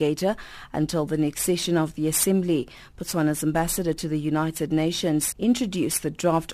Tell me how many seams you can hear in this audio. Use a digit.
1